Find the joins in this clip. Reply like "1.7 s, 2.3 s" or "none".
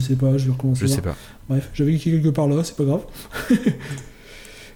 none